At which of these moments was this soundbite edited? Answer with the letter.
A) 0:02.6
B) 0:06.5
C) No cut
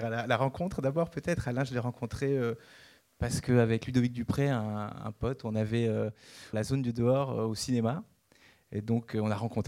B